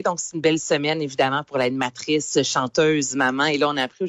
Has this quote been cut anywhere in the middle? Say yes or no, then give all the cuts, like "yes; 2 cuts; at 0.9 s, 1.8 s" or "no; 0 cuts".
no; 0 cuts